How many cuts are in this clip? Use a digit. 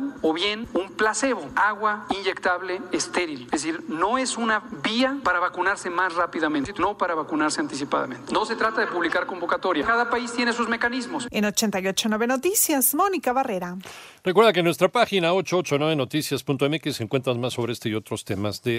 0